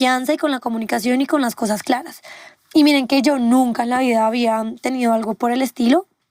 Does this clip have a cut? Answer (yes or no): no